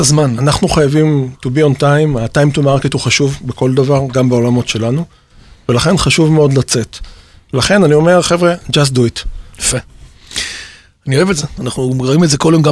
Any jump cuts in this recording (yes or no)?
yes